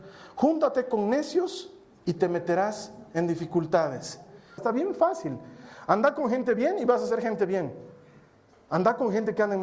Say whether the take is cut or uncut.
cut